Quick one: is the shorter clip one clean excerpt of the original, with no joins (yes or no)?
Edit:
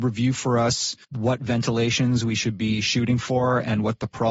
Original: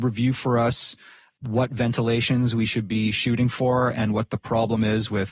no